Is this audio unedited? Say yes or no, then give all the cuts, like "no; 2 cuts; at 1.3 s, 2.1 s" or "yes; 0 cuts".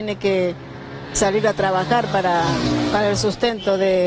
yes; 0 cuts